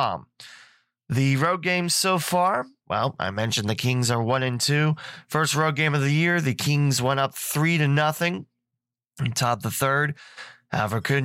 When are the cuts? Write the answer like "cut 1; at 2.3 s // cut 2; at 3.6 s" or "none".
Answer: none